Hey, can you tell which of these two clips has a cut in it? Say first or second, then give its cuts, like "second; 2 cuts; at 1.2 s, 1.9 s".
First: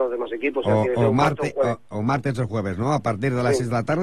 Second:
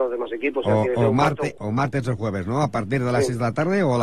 second; 1 cut; at 1.5 s